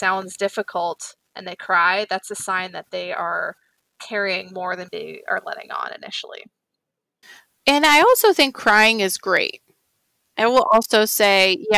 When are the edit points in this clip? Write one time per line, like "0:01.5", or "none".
none